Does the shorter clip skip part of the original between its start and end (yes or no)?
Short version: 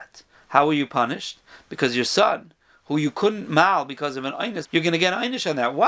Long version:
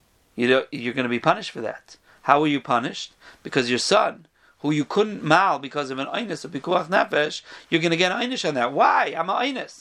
yes